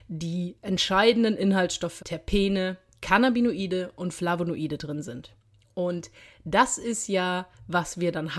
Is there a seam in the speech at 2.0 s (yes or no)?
yes